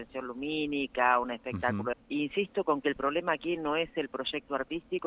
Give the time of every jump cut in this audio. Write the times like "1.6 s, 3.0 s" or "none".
1.9 s